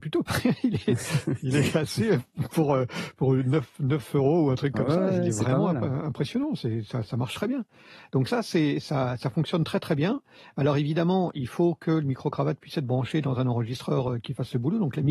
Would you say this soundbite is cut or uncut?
uncut